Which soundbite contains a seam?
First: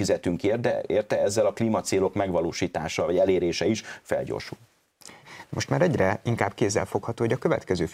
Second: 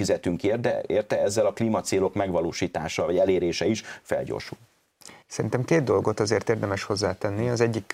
first; 1 cut; at 5.2 s

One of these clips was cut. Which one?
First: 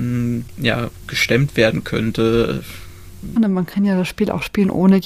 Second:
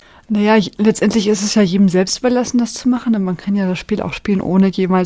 first; 1 cut; at 3.4 s

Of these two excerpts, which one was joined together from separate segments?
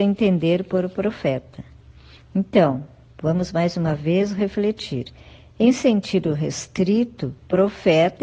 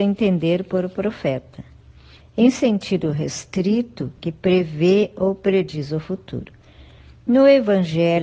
second; 2 cuts; at 2.2 s, 4.2 s

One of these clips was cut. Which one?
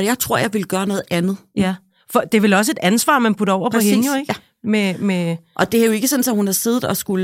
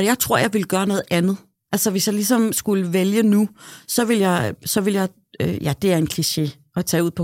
first; 1 cut; at 1.5 s

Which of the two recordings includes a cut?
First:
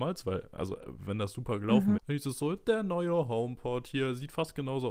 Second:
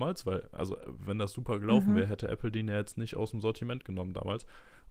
first; 1 cut; at 1.9 s

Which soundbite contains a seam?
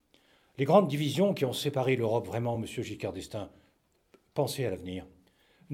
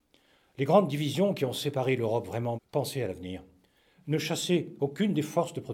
second; 1 cut; at 2.6 s

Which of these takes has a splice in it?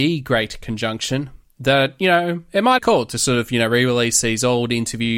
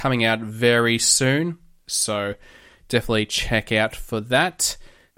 first; 1 cut; at 2.8 s

